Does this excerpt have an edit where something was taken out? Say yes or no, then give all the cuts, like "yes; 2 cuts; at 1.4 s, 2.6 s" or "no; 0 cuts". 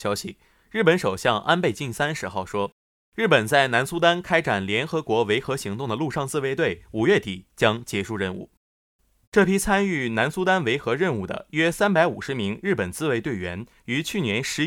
yes; 1 cut; at 9.2 s